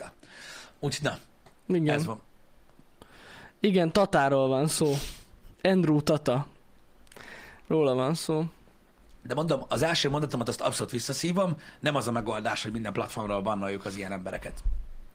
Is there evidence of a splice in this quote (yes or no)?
no